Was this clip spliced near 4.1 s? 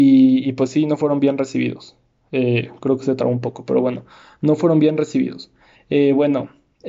no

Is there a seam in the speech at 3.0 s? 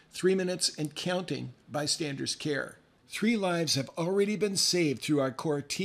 yes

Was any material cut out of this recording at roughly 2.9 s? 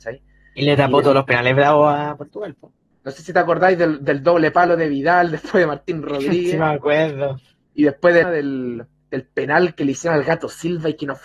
yes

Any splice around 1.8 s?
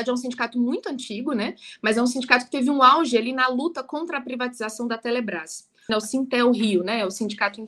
no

